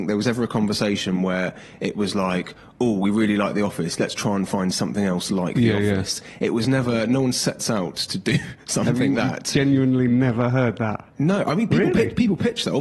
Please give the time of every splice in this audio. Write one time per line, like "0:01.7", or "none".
0:09.1
0:11.1

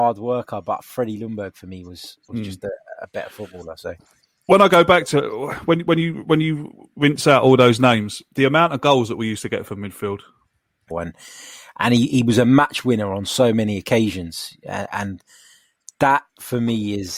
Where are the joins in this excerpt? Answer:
0:10.9

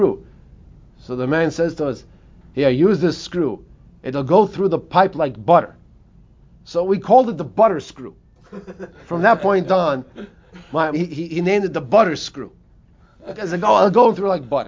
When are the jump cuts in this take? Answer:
0:10.9

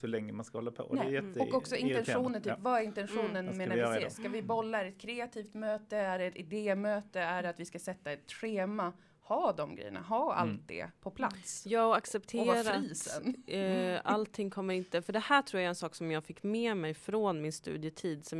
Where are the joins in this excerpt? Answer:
none

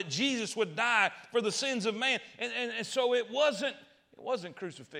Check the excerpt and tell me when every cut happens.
none

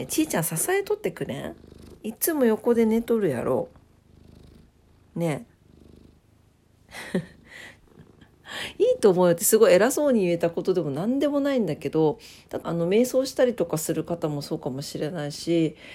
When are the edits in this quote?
0:07.8
0:12.6

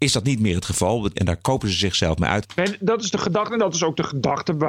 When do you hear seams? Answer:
0:01.1
0:02.4

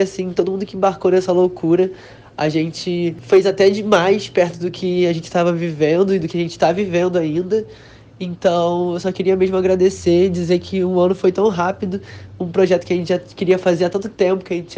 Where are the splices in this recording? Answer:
none

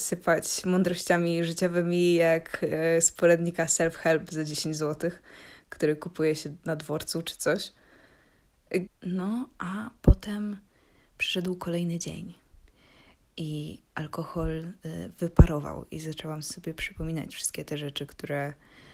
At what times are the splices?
0:08.9

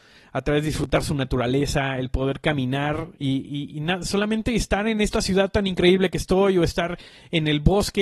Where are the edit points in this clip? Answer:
0:03.1

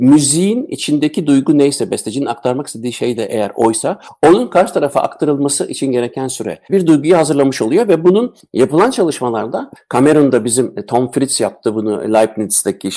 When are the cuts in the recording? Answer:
0:06.7

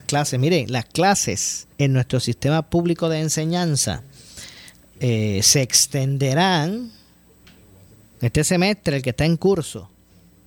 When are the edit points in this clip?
0:01.7

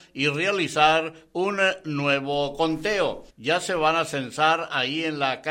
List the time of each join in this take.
0:03.3

